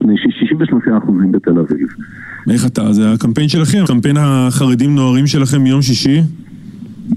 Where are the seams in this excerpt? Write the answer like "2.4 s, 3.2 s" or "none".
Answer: 2.5 s, 3.8 s